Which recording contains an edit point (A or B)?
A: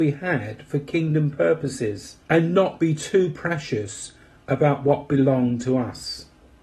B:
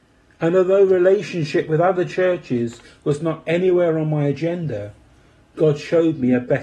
A